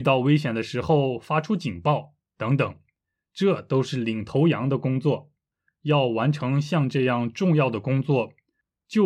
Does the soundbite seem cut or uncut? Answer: uncut